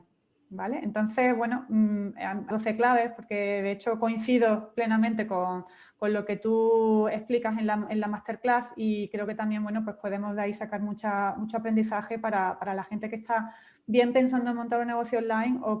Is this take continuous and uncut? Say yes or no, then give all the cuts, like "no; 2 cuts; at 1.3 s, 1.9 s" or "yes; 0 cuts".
no; 1 cut; at 2.5 s